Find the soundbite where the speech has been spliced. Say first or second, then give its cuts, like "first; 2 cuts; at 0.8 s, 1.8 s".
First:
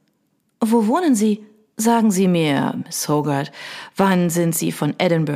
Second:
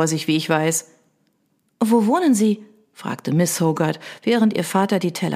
first; 1 cut; at 1.7 s